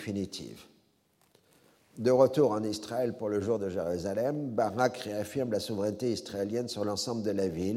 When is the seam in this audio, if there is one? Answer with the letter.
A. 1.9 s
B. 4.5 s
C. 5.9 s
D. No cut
D